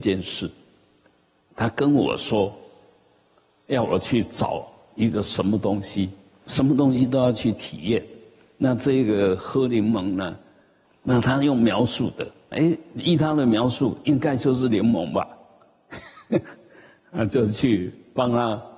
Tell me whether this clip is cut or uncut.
cut